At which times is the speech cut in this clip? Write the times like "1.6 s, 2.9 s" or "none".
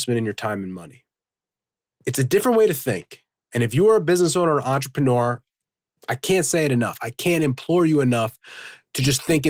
none